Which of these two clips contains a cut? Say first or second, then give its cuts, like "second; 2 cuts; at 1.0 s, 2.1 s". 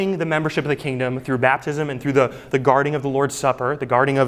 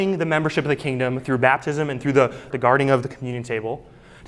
second; 1 cut; at 2.5 s